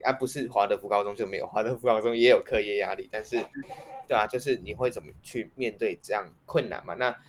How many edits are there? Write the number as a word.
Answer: one